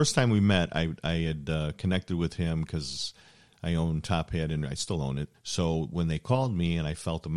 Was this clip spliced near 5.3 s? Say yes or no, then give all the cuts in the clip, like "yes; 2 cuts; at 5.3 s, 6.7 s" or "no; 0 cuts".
yes; 1 cut; at 5.3 s